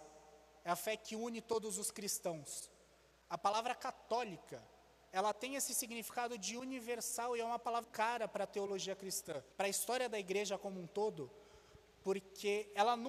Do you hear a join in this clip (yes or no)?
yes